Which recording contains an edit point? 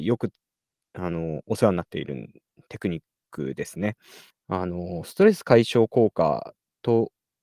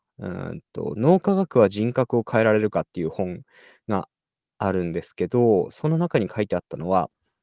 first; 1 cut; at 4.3 s

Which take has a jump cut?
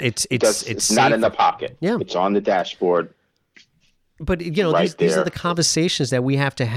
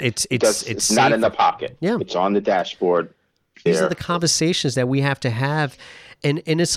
second; 1 cut; at 3.7 s

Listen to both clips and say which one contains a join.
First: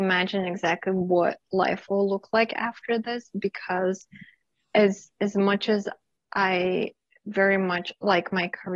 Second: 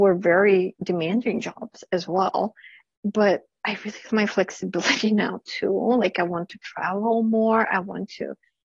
second; 1 cut; at 4.1 s

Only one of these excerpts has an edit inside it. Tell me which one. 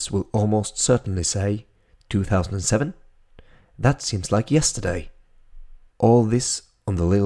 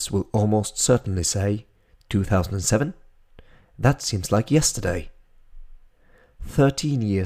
first; 1 cut; at 5.9 s

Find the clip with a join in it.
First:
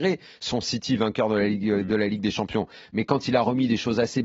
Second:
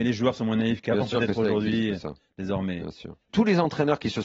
second; 1 cut; at 3.3 s

